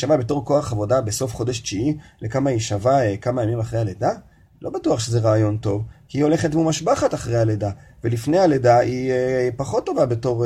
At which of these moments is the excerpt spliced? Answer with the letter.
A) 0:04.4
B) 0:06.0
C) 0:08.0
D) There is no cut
D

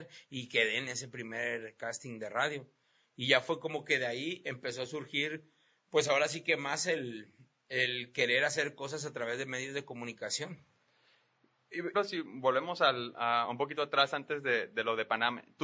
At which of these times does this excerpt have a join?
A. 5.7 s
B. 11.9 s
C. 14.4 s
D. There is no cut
B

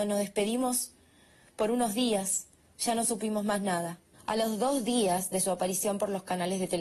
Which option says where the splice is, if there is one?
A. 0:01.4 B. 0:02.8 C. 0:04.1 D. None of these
C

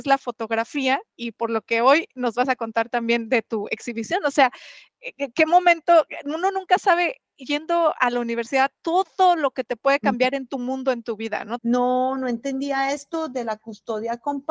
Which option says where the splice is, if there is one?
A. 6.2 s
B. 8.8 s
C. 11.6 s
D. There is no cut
C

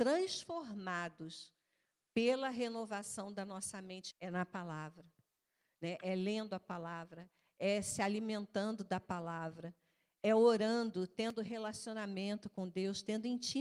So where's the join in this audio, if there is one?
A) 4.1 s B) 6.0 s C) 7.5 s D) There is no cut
A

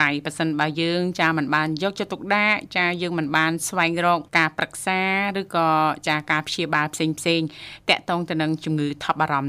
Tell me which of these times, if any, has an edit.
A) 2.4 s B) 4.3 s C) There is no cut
B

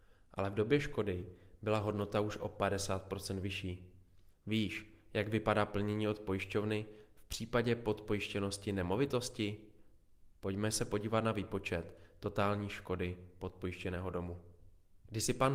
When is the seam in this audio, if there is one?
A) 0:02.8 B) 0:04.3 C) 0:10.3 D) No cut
B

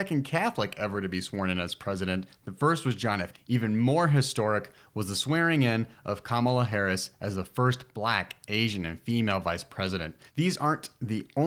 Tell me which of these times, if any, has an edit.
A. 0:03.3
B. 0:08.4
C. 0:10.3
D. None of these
A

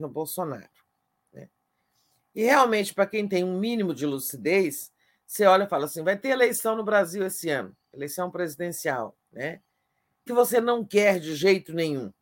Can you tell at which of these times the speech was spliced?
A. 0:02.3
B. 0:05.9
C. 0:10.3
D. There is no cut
C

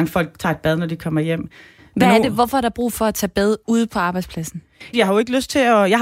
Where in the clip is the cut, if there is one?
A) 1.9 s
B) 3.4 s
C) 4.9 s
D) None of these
C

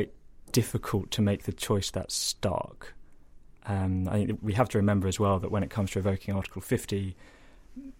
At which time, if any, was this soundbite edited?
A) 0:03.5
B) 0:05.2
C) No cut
C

